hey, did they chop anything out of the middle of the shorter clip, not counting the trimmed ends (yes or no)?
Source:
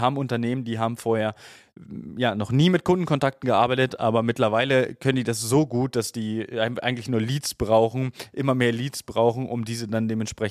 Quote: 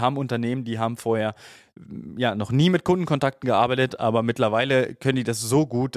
no